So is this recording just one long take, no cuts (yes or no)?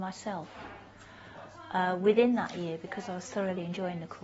yes